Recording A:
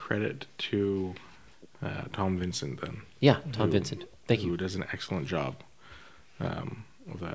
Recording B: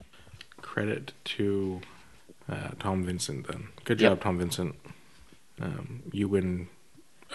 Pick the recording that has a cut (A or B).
B